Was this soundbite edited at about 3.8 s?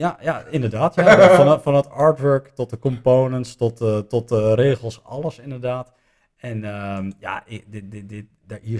no; 0 cuts

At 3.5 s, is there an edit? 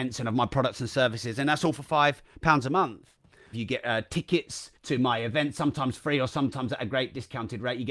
yes; 2 cuts; at 3.5 s, 4.8 s

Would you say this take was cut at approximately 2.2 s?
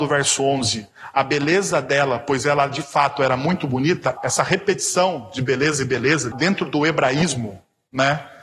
no; 2 cuts; at 4.2 s, 6.3 s

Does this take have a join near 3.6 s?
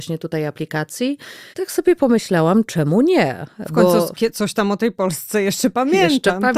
no; 1 cut; at 1.5 s

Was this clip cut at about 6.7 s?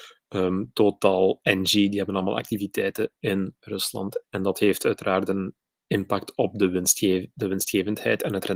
no; 1 cut; at 4.2 s

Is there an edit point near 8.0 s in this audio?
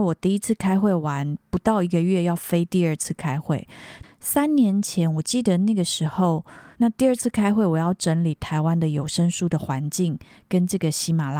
no; 2 cuts; at 4.0 s, 6.7 s

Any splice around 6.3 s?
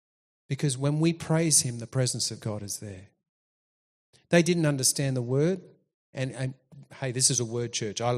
no; 0 cuts

